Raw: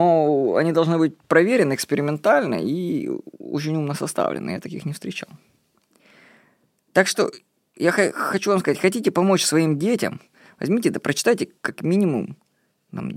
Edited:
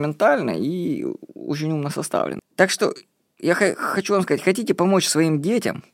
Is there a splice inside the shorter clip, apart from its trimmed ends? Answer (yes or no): yes